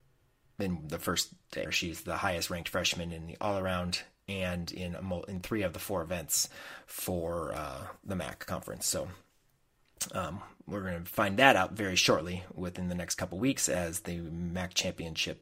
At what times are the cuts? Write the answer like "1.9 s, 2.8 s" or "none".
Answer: 1.6 s